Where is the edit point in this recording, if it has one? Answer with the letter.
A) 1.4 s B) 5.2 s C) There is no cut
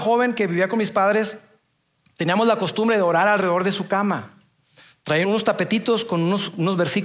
B